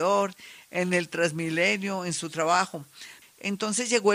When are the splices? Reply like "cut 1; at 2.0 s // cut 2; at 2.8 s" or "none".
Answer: cut 1; at 3.2 s